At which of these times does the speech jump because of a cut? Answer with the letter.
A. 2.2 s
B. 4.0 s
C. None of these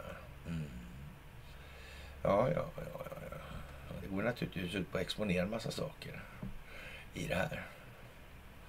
C